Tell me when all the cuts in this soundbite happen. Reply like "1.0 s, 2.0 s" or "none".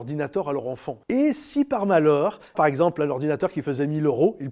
1.0 s, 2.5 s